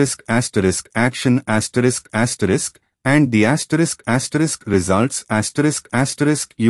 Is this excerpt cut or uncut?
uncut